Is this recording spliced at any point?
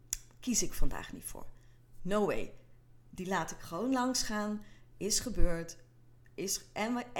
no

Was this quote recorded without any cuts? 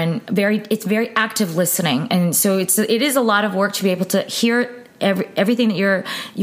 yes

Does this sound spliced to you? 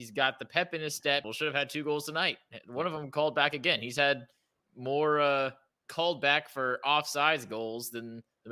yes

